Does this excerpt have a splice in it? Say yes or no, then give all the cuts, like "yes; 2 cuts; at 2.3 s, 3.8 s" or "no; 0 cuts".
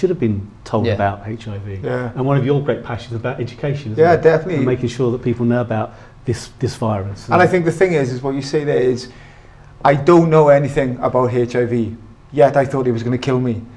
no; 0 cuts